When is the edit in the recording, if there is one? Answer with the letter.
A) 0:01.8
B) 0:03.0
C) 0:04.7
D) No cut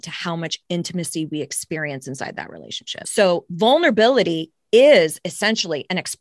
B